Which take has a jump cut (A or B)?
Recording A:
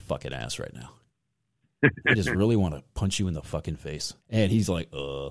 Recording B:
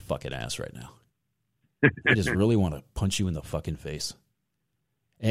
A